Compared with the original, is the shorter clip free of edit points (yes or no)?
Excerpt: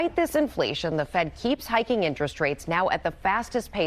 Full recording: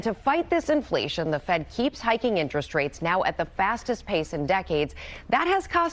yes